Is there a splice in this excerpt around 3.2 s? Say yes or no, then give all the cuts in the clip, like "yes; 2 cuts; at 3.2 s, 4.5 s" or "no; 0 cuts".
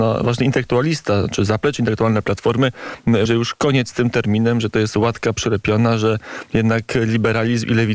yes; 1 cut; at 3.2 s